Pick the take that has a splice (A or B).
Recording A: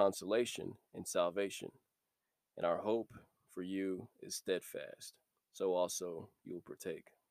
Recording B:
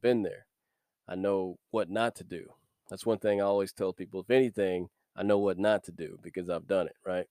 A